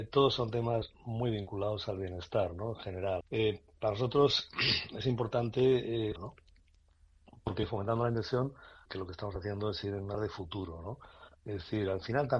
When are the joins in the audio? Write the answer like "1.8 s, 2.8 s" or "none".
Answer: 3.2 s, 6.2 s, 8.9 s

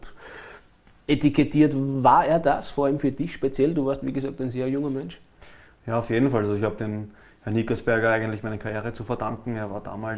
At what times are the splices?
none

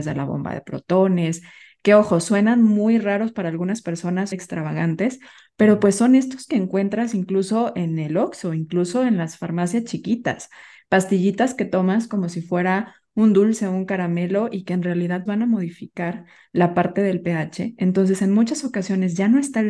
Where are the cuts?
4.3 s, 15.3 s

